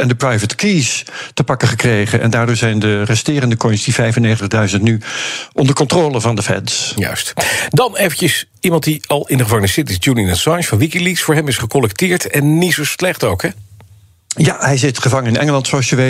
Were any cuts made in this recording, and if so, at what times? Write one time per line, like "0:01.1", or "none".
none